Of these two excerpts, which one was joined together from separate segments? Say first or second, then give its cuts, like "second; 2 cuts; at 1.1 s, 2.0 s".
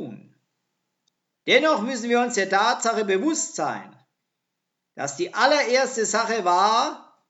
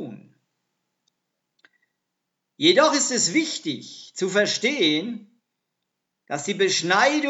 first; 1 cut; at 1.4 s